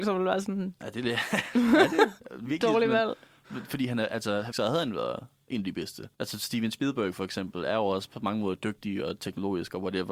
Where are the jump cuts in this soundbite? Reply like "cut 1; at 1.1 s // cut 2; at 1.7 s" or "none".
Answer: cut 1; at 4.5 s // cut 2; at 6.1 s